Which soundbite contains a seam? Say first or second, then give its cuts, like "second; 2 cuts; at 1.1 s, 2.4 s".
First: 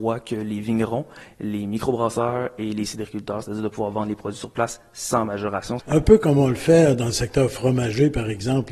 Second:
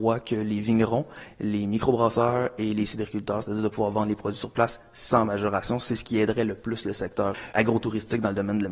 first; 1 cut; at 5.8 s